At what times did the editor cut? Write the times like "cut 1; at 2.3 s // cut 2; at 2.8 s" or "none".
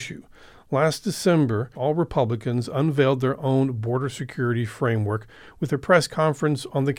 cut 1; at 1.7 s